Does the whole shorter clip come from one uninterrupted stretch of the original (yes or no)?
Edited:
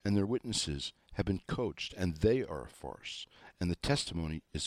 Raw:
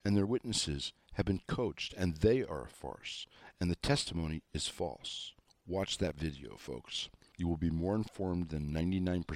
yes